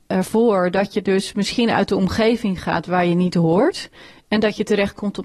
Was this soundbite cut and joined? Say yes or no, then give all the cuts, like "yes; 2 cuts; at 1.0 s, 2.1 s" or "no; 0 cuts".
no; 0 cuts